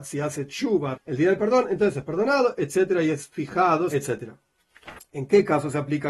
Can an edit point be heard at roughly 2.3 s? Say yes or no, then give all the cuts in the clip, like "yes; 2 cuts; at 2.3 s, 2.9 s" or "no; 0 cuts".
no; 3 cuts; at 0.9 s, 3.9 s, 5.0 s